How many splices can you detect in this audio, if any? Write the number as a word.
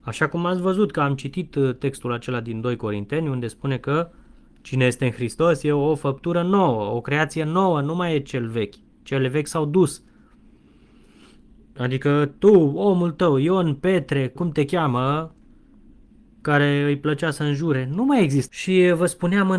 two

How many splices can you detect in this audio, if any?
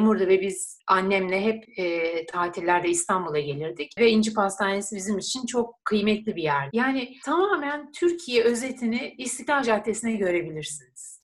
one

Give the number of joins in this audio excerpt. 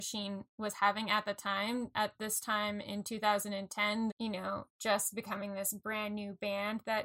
one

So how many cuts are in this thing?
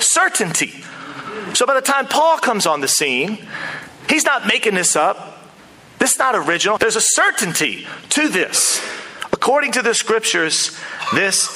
one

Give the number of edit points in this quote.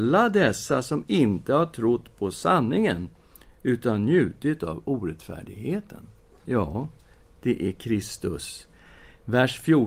one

